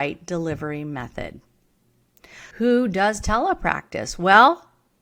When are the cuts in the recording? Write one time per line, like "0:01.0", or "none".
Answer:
0:02.5